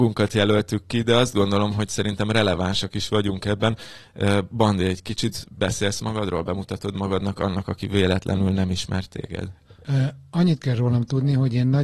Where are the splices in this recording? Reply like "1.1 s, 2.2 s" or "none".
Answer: none